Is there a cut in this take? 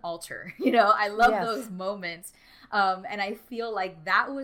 no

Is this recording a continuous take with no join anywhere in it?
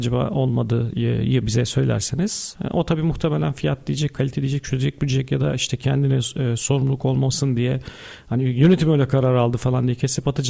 yes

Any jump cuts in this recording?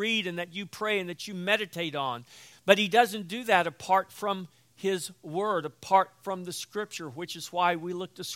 yes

